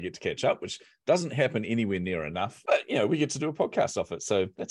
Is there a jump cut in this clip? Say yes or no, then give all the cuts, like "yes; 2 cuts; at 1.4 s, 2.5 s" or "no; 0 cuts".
no; 0 cuts